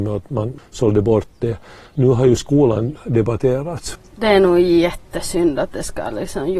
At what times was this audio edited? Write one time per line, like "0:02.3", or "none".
0:03.9

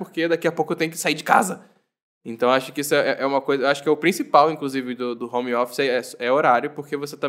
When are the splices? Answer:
0:05.2

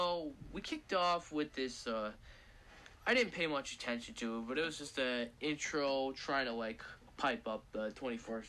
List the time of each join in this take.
none

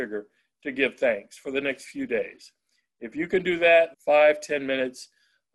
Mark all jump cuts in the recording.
0:03.9

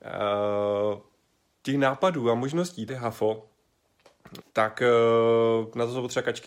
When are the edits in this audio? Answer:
0:02.9
0:04.4

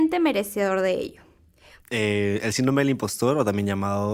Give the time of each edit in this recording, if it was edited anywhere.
0:01.8

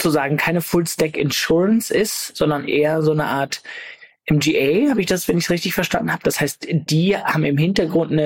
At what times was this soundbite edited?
none

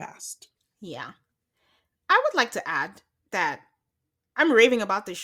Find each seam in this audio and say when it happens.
none

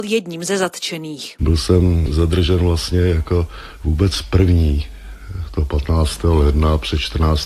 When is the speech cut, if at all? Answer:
none

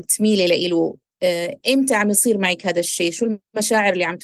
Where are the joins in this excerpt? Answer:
none

